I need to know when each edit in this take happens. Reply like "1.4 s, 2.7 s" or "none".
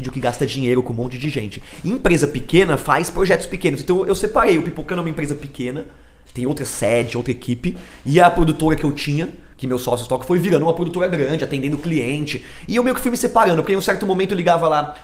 none